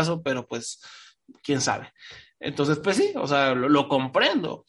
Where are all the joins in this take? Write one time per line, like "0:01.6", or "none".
none